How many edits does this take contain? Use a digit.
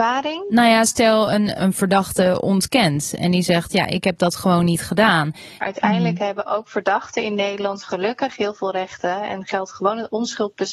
1